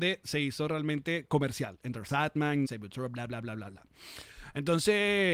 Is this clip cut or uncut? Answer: cut